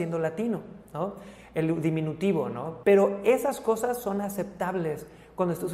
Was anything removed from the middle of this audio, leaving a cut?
yes; 1 cut; at 2.8 s

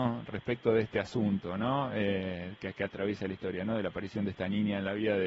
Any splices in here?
no; 0 cuts

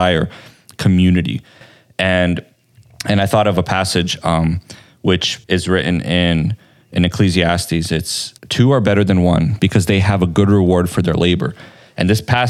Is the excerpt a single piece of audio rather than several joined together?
no; 2 cuts; at 5.4 s, 8.4 s

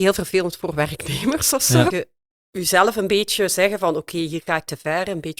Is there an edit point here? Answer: yes; 1 cut; at 1.9 s

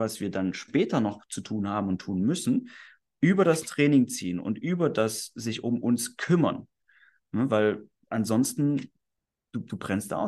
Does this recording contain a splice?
no; 0 cuts

